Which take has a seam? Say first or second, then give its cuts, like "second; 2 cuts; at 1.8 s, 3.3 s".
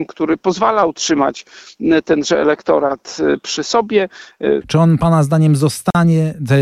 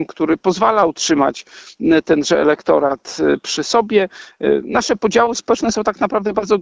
first; 1 cut; at 4.6 s